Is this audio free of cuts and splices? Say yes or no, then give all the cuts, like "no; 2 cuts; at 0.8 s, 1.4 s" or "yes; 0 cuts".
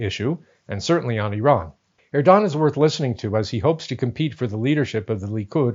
no; 1 cut; at 2.0 s